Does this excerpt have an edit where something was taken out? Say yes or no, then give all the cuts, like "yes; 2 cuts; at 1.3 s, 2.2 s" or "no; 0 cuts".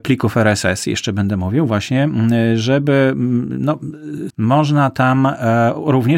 yes; 1 cut; at 4.3 s